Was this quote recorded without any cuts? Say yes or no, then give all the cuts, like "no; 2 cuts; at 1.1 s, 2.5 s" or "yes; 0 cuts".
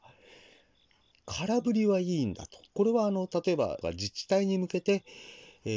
no; 2 cuts; at 2.7 s, 3.8 s